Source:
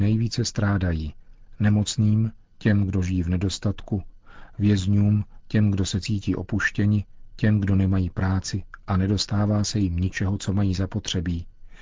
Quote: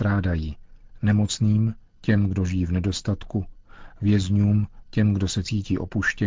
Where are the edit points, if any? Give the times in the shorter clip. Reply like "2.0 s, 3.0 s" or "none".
none